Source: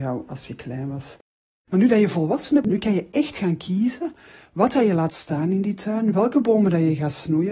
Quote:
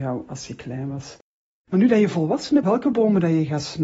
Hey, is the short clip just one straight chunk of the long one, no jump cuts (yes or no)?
no